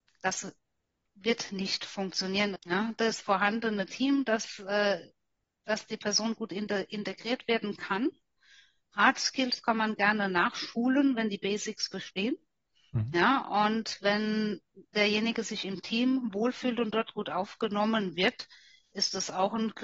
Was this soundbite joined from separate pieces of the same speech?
yes; 1 cut; at 2.6 s

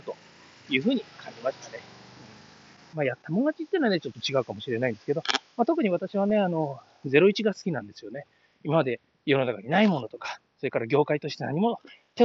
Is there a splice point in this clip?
yes; 1 cut; at 2.9 s

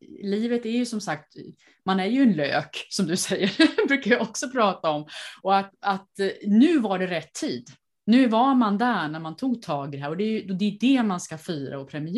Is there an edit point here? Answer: no; 0 cuts

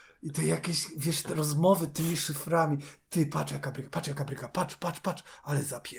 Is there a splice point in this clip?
no; 0 cuts

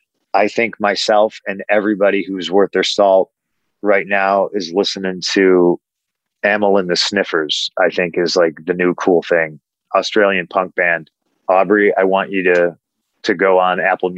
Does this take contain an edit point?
yes; 1 cut; at 11.3 s

